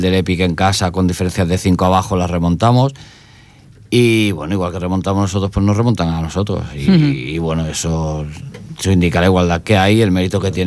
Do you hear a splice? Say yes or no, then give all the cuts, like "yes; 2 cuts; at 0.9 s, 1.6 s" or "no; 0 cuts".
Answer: no; 0 cuts